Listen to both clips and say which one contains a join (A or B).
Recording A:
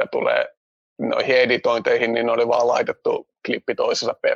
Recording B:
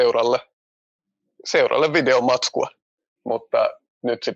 B